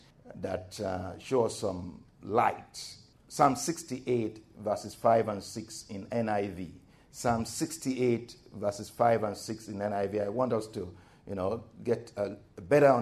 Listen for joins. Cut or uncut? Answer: uncut